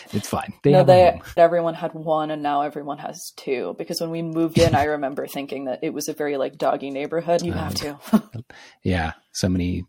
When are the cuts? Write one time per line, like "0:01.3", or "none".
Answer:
0:01.4
0:07.4